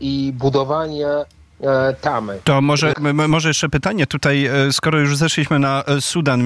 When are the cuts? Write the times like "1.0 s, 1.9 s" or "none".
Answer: 2.9 s